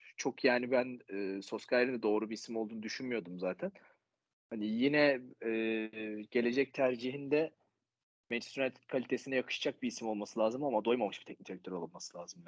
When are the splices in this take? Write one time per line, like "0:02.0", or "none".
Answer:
none